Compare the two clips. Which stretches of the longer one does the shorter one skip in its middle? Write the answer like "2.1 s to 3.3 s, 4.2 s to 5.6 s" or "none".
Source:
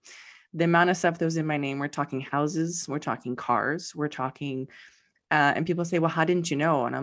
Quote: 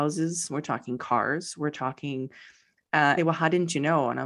5.5 s to 5.9 s